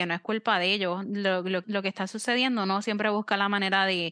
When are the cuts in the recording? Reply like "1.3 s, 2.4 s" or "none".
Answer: 1.6 s